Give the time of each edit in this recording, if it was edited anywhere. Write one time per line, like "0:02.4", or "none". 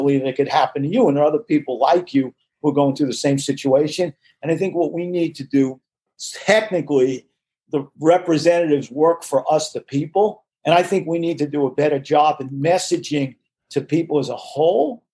none